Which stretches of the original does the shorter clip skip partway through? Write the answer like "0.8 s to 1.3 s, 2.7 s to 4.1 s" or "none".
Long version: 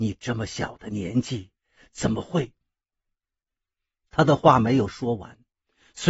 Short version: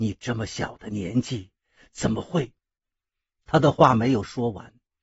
2.6 s to 3.2 s